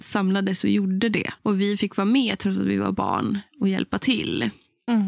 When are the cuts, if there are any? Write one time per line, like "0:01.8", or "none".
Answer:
0:01.4